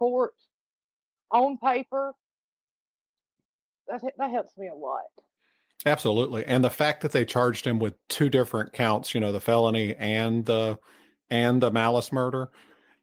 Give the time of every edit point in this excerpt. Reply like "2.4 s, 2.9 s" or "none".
none